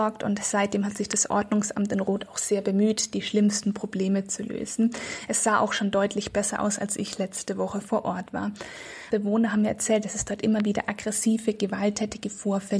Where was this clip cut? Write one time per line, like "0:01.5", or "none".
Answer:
0:09.1